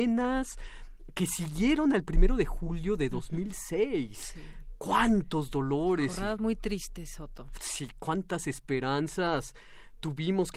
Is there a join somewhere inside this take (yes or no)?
no